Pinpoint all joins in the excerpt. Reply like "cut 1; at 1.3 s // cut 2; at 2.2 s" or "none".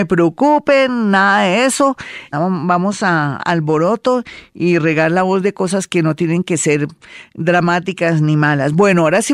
cut 1; at 2.3 s // cut 2; at 3.4 s

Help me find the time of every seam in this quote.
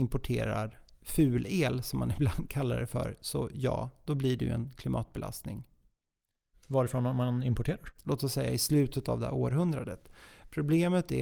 cut 1; at 6.5 s // cut 2; at 8.0 s

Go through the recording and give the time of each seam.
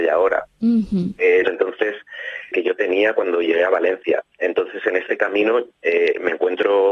cut 1; at 1.5 s // cut 2; at 2.5 s

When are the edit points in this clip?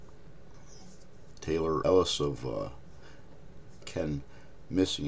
cut 1; at 1.8 s // cut 2; at 3.8 s

